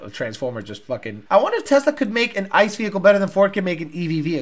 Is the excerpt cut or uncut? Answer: cut